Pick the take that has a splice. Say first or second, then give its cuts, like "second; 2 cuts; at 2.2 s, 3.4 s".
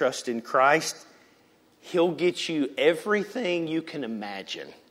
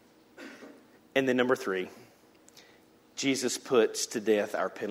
second; 1 cut; at 1.0 s